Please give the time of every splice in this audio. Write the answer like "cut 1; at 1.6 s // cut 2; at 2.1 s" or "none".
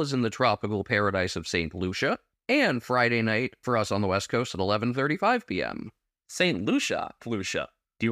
cut 1; at 7.2 s

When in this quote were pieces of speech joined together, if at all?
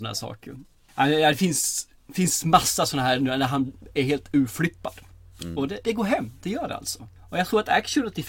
none

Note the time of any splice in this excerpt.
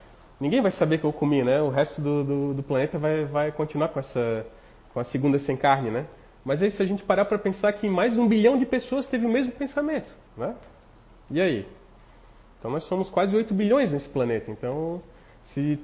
cut 1; at 10.3 s

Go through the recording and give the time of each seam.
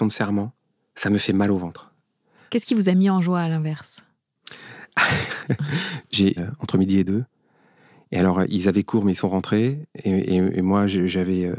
cut 1; at 6.4 s

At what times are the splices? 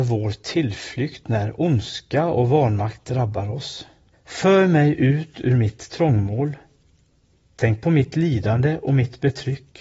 cut 1; at 4.1 s

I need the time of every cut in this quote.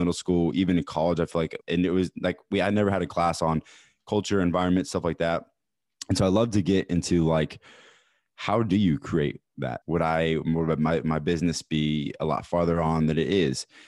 cut 1; at 1.6 s // cut 2; at 9.8 s

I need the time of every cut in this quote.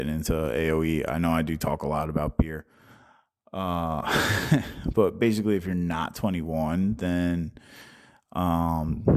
none

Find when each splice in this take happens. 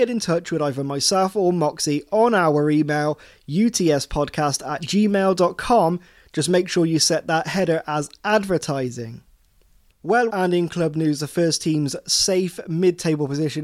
cut 1; at 10.3 s

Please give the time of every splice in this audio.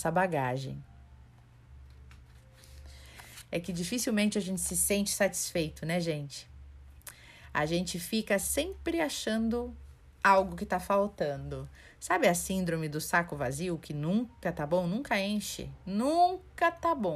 none

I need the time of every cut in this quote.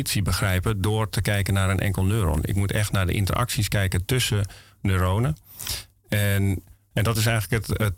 none

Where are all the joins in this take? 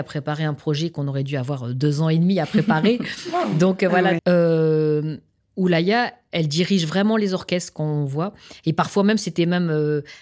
cut 1; at 4.2 s

